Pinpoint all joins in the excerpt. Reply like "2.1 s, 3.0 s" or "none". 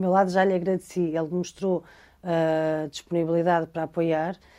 none